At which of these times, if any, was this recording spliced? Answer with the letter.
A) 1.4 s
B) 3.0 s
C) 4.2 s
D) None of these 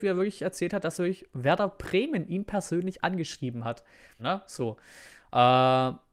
C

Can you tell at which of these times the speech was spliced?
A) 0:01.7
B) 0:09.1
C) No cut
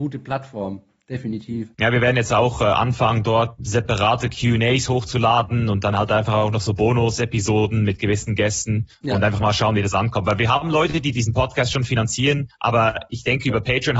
A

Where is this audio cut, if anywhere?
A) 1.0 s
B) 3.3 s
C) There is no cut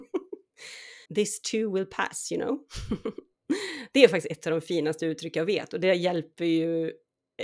A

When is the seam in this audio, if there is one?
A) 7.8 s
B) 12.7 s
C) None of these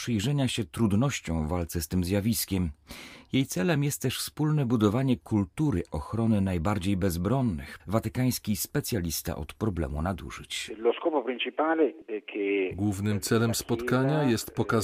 A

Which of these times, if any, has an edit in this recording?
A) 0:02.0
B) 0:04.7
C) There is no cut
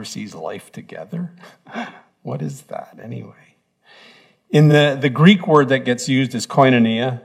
C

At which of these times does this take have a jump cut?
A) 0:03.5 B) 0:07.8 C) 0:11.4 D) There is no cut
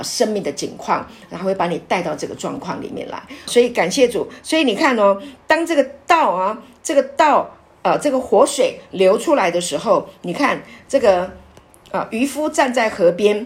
A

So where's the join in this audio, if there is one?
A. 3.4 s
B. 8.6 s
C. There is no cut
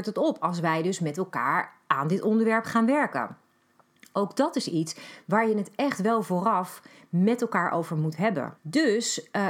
B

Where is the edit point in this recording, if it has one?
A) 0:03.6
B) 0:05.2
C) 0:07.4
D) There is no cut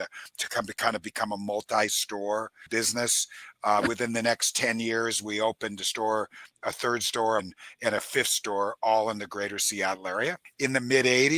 C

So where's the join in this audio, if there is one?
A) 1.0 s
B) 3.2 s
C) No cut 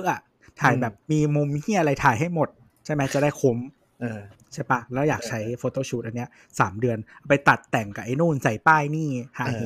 A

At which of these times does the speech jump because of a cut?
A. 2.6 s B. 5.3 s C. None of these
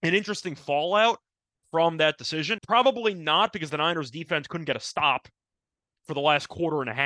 A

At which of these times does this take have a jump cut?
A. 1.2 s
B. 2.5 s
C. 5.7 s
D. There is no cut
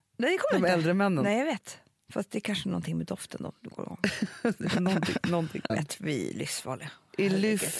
C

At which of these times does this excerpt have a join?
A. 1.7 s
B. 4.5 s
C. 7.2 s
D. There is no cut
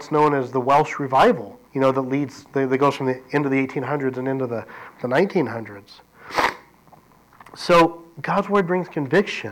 A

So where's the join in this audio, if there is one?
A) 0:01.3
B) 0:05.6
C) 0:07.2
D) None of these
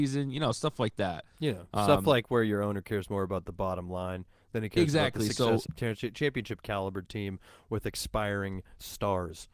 B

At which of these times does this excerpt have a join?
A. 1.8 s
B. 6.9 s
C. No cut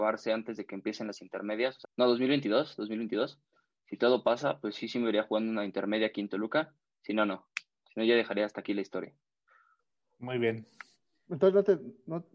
A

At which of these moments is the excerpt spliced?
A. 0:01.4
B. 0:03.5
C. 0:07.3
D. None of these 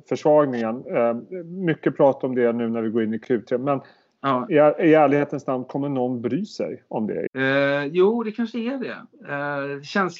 C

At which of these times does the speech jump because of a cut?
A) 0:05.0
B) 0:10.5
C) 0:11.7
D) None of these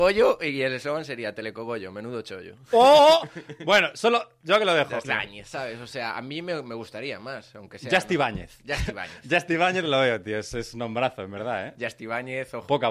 A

